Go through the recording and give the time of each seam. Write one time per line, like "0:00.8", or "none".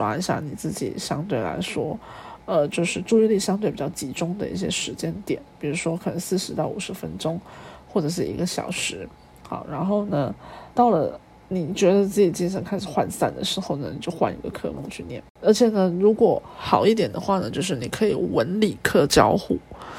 0:10.7

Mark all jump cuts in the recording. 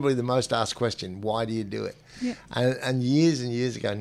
none

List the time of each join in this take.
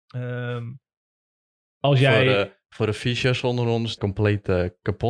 0:04.0

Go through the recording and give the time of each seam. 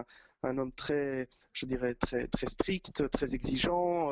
none

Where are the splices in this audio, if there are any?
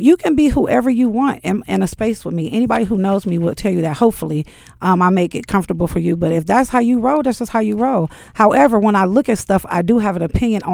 0:08.3

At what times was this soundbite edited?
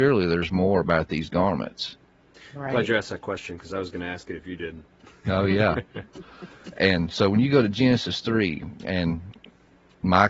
none

